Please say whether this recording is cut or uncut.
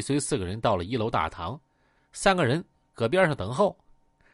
cut